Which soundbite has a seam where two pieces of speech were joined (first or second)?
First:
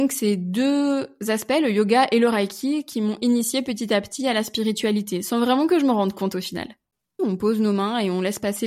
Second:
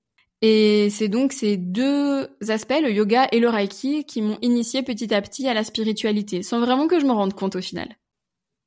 first